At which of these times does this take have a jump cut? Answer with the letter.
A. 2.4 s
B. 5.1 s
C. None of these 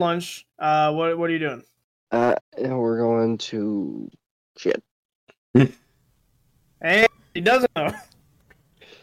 A